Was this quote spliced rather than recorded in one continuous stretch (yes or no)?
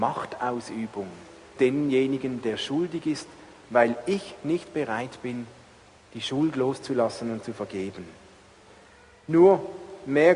yes